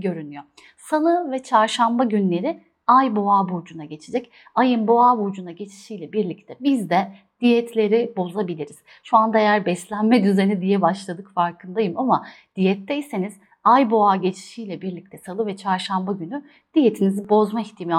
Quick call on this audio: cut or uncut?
uncut